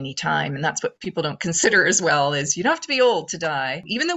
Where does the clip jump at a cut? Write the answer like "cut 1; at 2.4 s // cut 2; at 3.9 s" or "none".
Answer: none